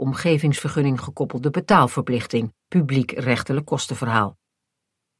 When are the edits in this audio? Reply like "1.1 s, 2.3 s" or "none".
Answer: 2.6 s